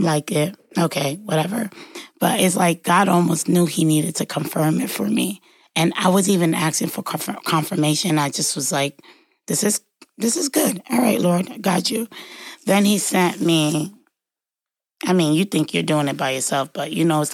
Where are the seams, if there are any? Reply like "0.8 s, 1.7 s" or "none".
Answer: none